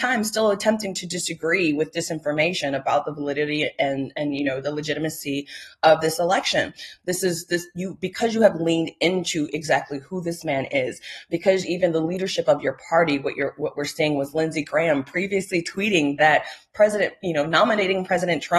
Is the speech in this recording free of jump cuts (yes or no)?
no